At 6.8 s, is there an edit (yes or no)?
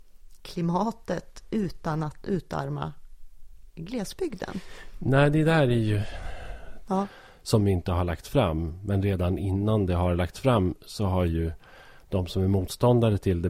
yes